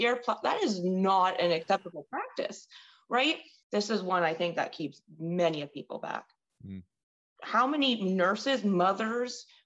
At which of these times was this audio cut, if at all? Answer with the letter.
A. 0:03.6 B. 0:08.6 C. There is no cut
A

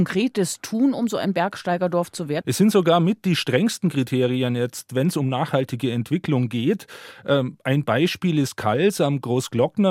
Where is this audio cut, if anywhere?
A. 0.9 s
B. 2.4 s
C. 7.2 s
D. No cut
B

